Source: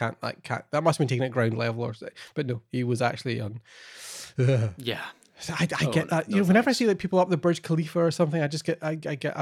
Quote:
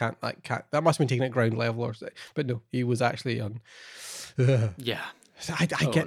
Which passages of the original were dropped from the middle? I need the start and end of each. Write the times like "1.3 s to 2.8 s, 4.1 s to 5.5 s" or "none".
none